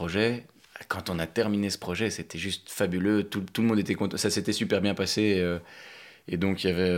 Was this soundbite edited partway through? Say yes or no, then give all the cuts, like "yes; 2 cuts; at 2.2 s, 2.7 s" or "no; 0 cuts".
no; 0 cuts